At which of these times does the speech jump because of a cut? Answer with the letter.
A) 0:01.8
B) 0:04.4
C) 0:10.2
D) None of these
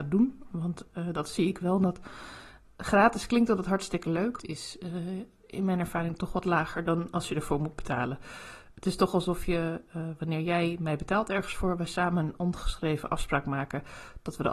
B